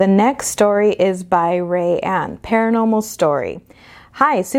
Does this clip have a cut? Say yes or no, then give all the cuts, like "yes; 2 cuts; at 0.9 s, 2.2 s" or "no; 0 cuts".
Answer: no; 0 cuts